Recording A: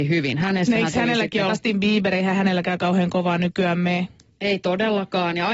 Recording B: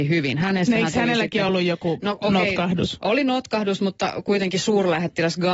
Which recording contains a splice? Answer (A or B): A